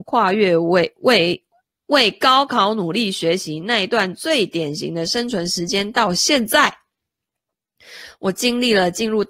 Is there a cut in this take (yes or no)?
no